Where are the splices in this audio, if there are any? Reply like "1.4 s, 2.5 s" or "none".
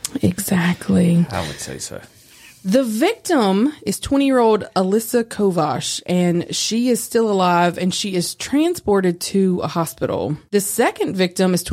none